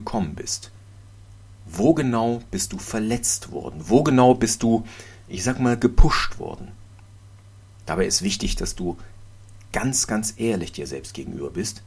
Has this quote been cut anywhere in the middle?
no; 0 cuts

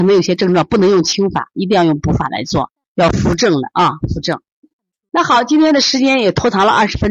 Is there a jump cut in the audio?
no; 0 cuts

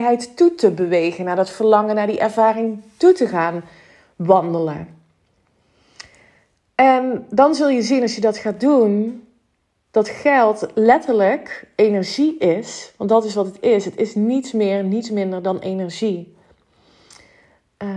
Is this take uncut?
yes; 0 cuts

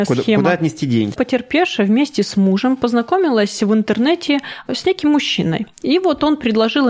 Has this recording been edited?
yes; 1 cut; at 1.1 s

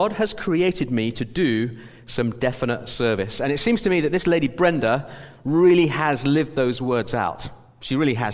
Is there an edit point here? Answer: no; 0 cuts

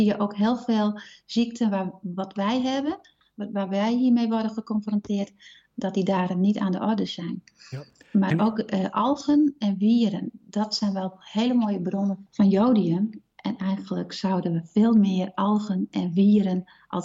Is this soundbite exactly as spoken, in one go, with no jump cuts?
yes; 0 cuts

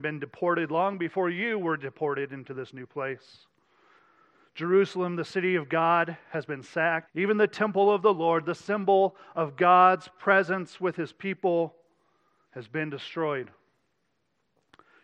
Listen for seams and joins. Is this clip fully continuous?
no; 1 cut; at 7.1 s

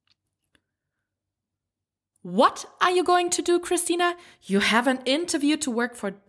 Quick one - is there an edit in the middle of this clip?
no; 0 cuts

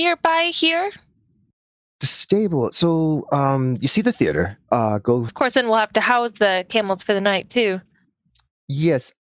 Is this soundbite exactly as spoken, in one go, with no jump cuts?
no; 1 cut; at 5.3 s

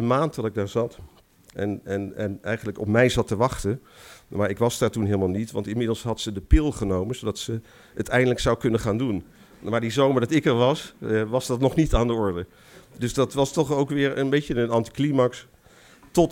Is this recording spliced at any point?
yes; 1 cut; at 1.5 s

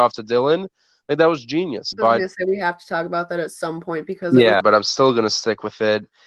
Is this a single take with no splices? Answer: no; 2 cuts; at 1.9 s, 4.6 s

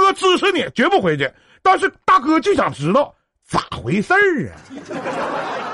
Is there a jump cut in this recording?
no; 0 cuts

